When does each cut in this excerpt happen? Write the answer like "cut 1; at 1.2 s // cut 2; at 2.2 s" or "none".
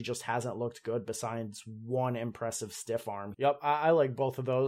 cut 1; at 3.3 s